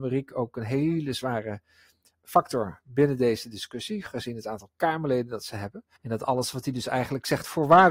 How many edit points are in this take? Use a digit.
1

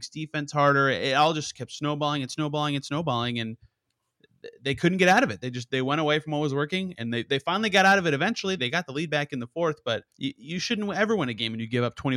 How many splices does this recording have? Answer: 2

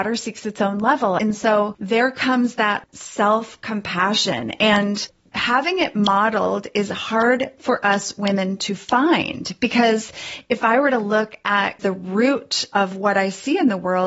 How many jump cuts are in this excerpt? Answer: 1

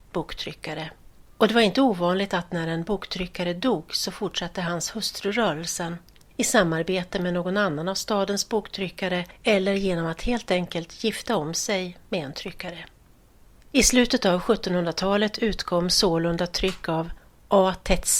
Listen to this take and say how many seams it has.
2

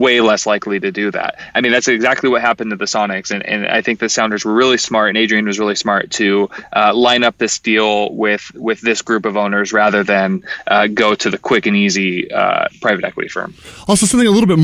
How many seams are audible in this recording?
0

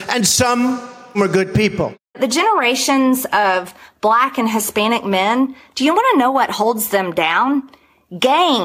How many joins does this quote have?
1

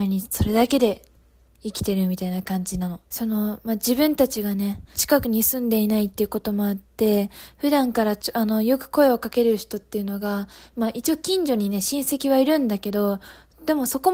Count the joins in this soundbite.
2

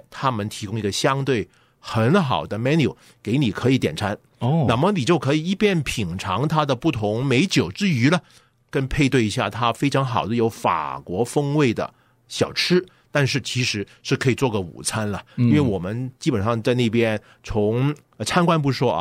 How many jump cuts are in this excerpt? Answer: 0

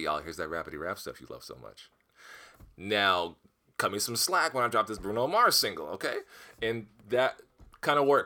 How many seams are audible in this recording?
0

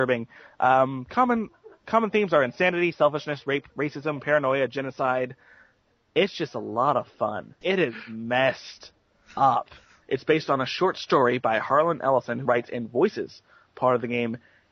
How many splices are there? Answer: 3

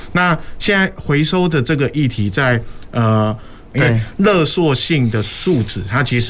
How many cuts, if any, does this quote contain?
1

